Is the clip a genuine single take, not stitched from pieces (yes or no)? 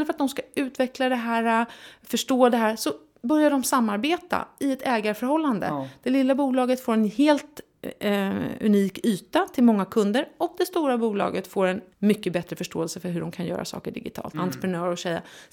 no